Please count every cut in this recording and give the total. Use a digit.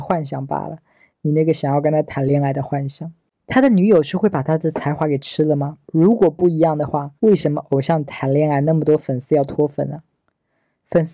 3